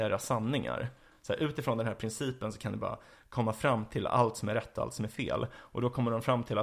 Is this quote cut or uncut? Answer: uncut